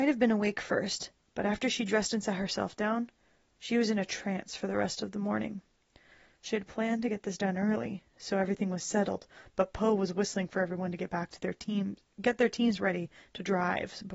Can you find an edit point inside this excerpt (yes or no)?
no